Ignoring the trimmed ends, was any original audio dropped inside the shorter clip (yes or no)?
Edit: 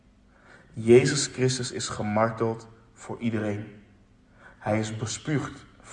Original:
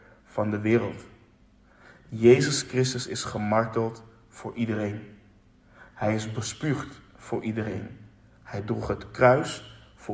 no